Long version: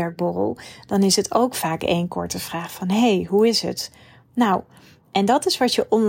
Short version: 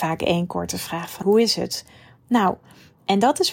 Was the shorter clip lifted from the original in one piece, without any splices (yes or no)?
no